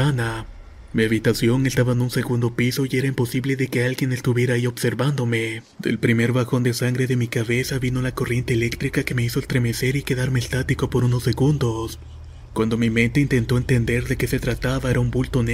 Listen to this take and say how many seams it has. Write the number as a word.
one